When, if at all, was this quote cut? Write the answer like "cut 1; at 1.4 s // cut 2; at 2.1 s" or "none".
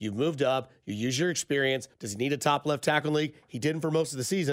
cut 1; at 1.9 s